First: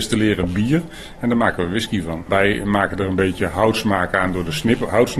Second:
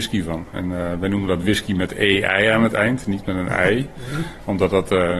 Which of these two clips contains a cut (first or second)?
first